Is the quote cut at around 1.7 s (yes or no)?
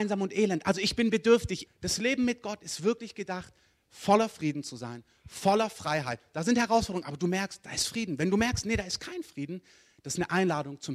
yes